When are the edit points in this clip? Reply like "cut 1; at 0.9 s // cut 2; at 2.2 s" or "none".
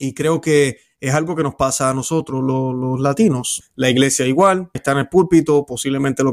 cut 1; at 3.6 s // cut 2; at 4.8 s

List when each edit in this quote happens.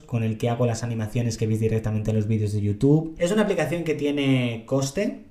cut 1; at 3.2 s

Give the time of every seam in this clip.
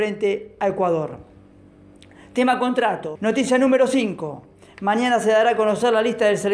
cut 1; at 3.2 s

